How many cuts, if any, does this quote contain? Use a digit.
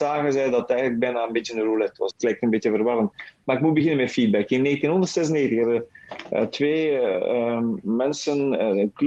1